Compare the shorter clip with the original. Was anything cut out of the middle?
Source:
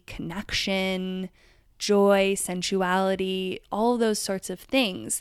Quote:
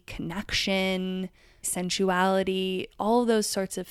yes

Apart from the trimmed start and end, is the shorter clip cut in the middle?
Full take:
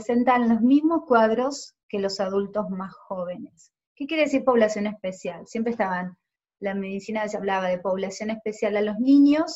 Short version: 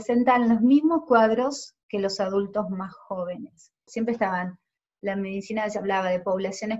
yes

